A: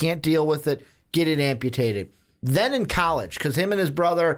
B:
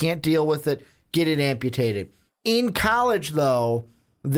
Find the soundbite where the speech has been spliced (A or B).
B